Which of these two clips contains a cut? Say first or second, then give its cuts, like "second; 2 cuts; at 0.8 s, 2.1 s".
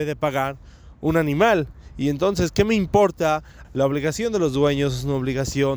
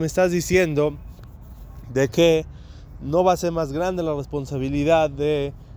first; 1 cut; at 3.6 s